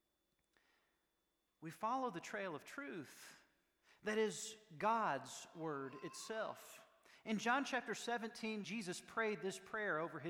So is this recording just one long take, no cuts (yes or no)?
no